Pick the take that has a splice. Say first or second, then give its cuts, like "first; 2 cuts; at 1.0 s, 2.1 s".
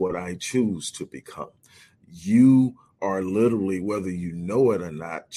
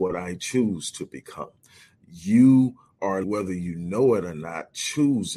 second; 1 cut; at 3.2 s